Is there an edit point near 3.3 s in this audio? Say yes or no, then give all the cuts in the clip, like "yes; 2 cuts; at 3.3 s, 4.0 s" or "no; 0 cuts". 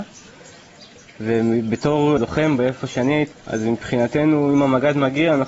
yes; 2 cuts; at 2.2 s, 3.3 s